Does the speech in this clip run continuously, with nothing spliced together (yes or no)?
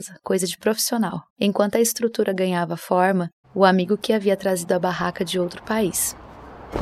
no